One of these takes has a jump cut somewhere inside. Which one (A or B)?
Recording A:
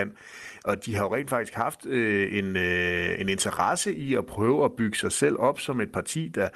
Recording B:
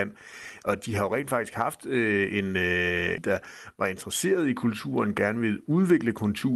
B